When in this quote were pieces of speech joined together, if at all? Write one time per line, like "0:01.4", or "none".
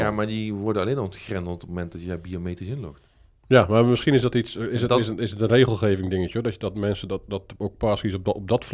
none